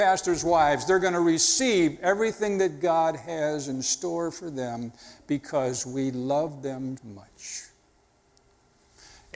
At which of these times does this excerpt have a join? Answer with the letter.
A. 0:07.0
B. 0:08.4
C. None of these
A